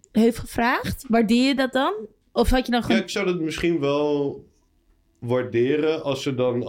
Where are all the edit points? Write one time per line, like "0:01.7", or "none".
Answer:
none